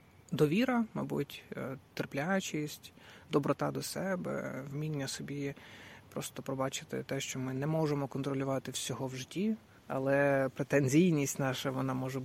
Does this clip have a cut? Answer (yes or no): yes